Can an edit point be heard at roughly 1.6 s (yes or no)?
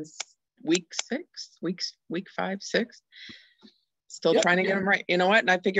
no